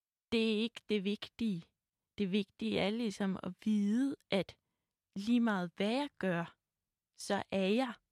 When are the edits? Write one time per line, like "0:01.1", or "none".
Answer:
none